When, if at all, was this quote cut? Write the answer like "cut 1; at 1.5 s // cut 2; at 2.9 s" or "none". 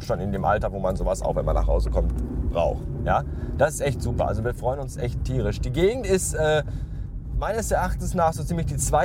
none